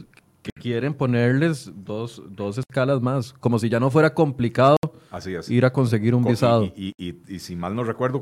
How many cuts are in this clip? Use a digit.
0